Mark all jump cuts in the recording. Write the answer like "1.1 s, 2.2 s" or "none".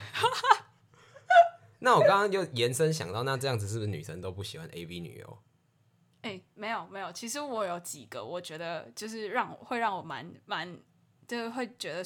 none

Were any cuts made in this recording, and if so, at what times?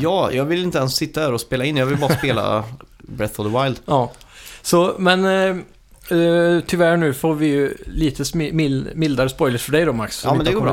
none

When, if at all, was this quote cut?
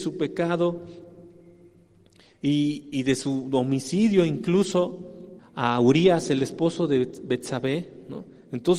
2.9 s, 5.4 s

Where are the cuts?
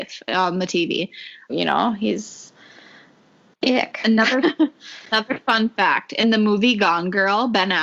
1.5 s

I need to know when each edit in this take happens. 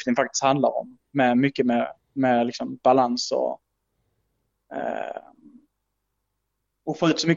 none

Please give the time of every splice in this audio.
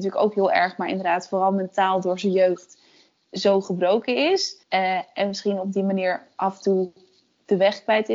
4.6 s

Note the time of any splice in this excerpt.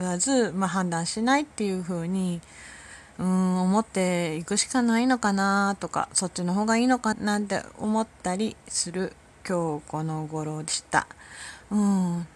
7.1 s

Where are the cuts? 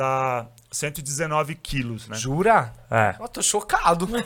none

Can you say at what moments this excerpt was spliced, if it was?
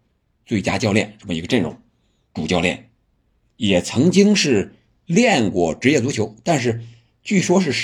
2.2 s

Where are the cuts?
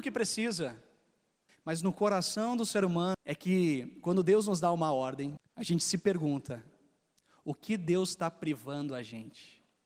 1.5 s, 3.1 s, 5.4 s

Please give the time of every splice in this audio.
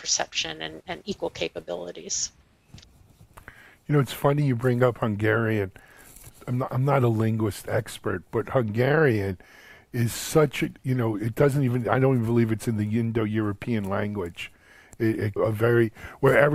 10.8 s, 15.4 s

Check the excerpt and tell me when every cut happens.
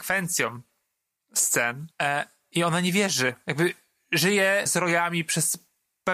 1.9 s, 4.7 s

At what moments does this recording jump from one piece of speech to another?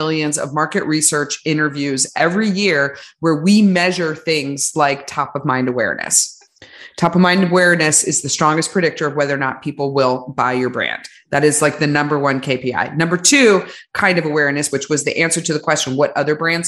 14.7 s

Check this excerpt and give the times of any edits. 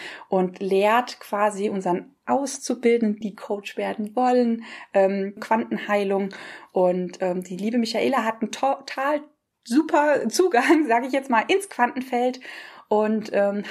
3.2 s, 5.4 s

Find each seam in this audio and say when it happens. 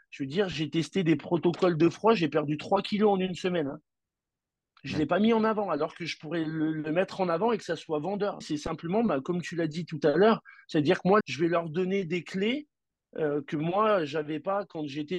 8.4 s, 11.2 s

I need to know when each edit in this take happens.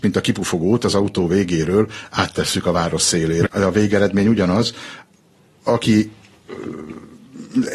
3.4 s

